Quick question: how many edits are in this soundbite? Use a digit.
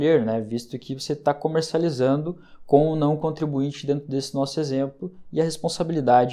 0